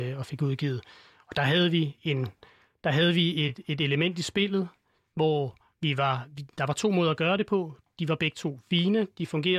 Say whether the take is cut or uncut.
uncut